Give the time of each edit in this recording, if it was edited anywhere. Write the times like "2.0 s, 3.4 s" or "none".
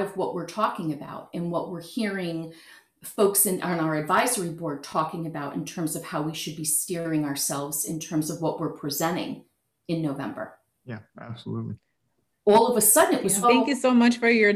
12.3 s, 13.4 s